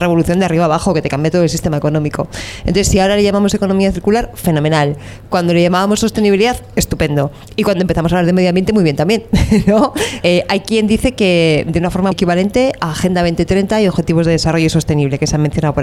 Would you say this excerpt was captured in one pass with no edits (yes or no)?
no